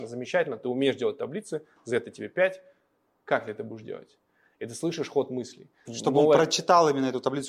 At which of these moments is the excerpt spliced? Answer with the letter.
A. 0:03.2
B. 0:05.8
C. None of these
B